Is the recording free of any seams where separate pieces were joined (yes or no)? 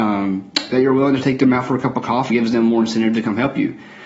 no